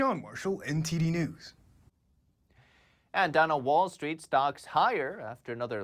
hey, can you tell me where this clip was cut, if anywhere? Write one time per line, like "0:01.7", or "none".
none